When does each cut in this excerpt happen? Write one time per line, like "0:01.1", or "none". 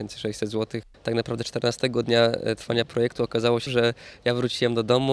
0:00.9
0:03.7